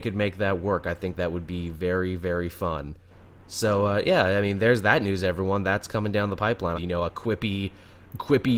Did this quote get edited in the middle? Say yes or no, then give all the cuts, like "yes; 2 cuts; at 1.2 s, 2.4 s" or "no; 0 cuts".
yes; 1 cut; at 6.7 s